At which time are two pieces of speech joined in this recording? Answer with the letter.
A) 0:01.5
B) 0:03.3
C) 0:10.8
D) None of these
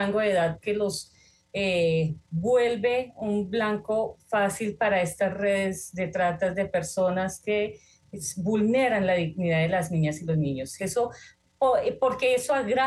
C